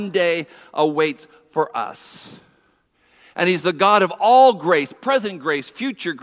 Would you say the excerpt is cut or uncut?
cut